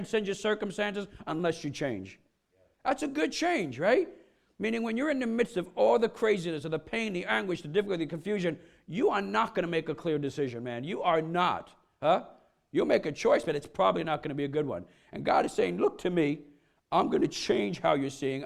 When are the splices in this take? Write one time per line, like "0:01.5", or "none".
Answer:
none